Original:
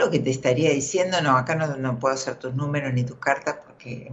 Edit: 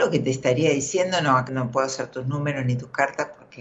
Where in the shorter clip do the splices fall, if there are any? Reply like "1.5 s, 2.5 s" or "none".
1.5 s